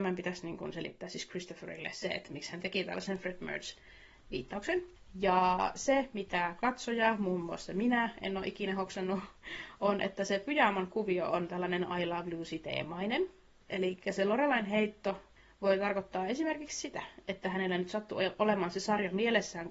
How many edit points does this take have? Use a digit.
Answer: 0